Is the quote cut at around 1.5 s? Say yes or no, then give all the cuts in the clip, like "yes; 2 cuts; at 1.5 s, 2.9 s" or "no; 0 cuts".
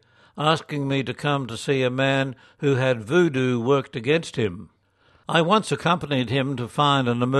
no; 1 cut; at 5.2 s